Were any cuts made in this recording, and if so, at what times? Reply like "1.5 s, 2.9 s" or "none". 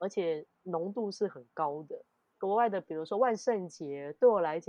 2.3 s